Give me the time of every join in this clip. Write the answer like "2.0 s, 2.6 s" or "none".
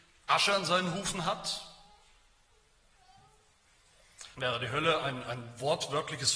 4.3 s